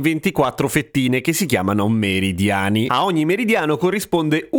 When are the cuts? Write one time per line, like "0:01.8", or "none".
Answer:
none